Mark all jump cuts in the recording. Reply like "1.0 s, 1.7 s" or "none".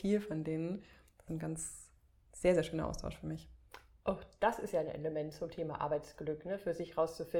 1.3 s